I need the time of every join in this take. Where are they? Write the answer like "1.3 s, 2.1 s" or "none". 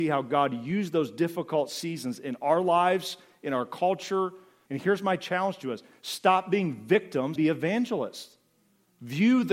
4.7 s, 7.4 s